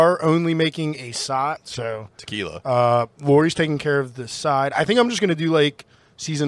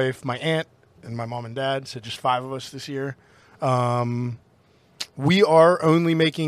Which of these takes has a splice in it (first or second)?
first